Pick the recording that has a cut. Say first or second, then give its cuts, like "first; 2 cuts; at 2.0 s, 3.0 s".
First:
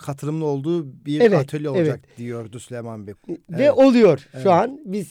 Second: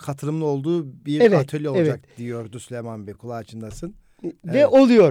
first; 1 cut; at 3.1 s